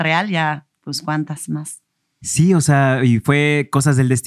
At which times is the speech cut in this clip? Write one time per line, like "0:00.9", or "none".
none